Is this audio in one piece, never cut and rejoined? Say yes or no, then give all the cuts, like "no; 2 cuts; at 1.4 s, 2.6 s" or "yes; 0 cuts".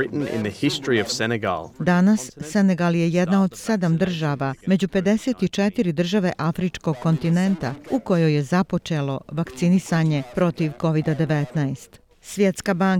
no; 1 cut; at 1.7 s